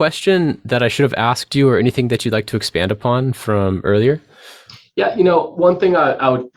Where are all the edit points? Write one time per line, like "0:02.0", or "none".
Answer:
none